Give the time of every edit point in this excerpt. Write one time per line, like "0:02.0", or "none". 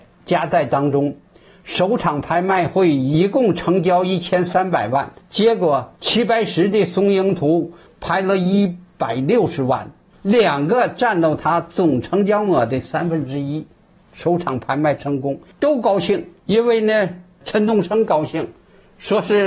0:10.1